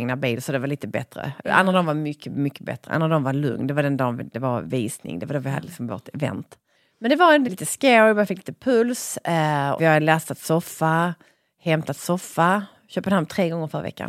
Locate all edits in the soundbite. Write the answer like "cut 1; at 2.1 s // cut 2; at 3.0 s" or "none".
cut 1; at 7.4 s // cut 2; at 9.8 s